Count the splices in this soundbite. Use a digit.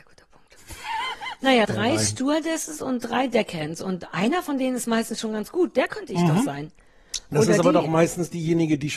1